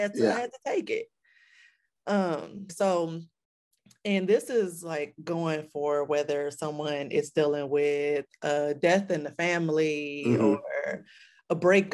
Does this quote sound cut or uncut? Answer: cut